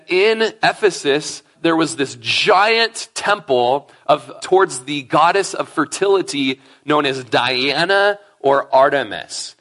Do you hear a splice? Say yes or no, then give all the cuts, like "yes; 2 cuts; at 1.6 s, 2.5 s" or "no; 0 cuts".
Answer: yes; 2 cuts; at 1.5 s, 4.4 s